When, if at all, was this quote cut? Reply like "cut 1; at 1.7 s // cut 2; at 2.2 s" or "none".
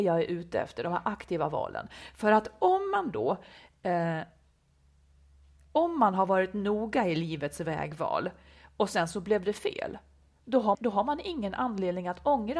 cut 1; at 10.7 s

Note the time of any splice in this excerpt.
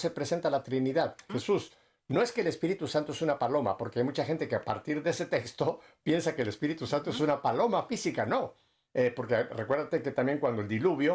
cut 1; at 1.3 s // cut 2; at 8.9 s

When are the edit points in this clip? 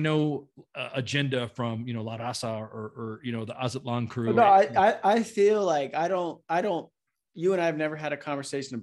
none

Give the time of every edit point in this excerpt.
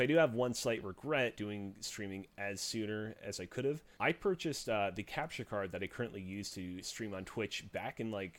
cut 1; at 1.4 s // cut 2; at 4.0 s

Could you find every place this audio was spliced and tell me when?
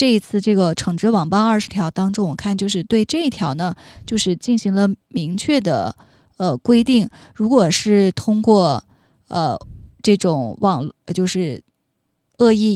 none

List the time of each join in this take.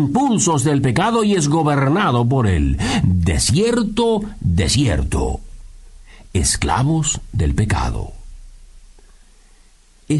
cut 1; at 3.0 s

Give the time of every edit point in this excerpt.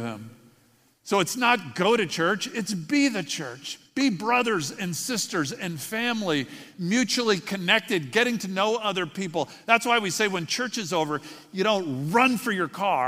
none

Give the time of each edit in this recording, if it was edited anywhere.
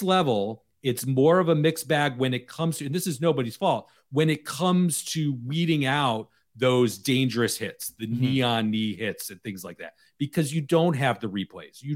none

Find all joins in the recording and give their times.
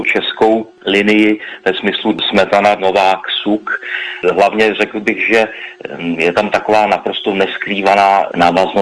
cut 1; at 2.8 s

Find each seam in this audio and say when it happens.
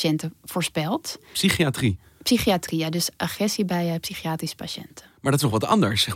none

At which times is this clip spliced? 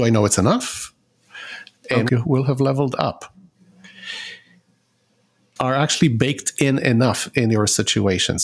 cut 1; at 2.1 s // cut 2; at 5.6 s

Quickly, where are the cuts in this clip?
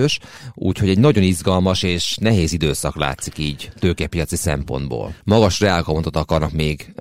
cut 1; at 5.2 s

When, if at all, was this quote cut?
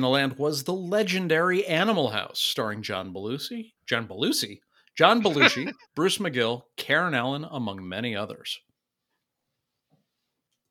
cut 1; at 3.8 s // cut 2; at 5.9 s

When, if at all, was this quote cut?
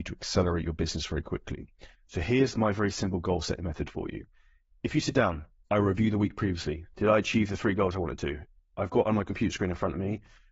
cut 1; at 5.7 s // cut 2; at 8.7 s

